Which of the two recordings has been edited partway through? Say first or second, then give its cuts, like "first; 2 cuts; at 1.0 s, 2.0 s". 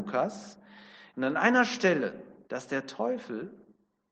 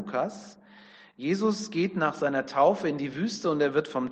first; 2 cuts; at 1.1 s, 2.5 s